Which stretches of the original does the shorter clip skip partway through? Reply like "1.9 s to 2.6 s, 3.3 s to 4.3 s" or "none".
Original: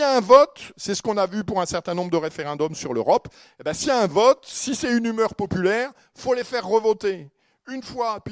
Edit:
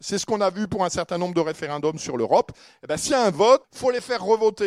4.4 s to 6.1 s